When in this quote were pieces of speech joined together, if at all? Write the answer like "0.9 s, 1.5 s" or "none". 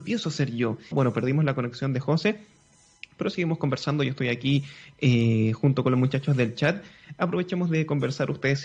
0.9 s